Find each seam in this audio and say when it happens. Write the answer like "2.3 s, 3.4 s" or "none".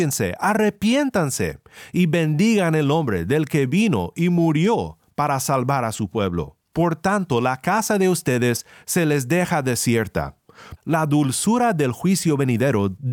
6.7 s, 10.8 s